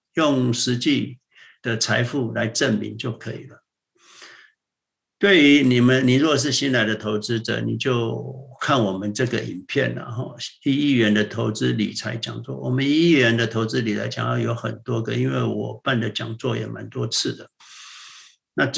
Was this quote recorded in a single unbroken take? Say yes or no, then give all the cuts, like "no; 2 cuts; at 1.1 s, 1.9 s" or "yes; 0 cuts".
yes; 0 cuts